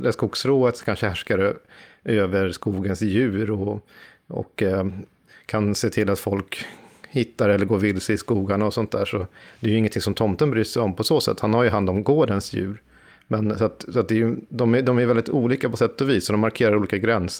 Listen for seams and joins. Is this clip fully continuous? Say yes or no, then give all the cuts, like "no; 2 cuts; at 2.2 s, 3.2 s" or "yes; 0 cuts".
yes; 0 cuts